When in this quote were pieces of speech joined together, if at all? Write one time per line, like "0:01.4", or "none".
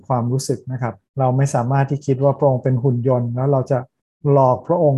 0:01.1